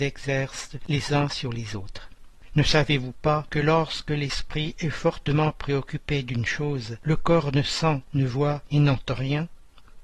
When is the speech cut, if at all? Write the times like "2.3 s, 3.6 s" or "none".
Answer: 2.5 s